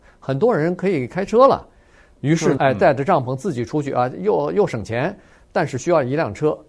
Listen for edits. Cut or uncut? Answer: cut